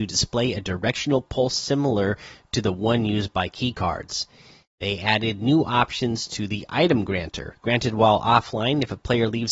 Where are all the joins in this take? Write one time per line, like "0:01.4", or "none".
0:07.6